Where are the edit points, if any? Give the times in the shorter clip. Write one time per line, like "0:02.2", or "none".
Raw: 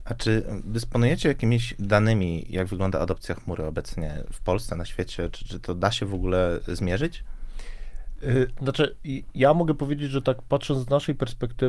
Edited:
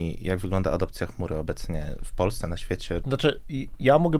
0:03.0